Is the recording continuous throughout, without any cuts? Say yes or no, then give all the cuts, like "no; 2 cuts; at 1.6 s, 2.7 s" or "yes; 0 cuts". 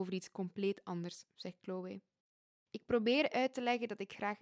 yes; 0 cuts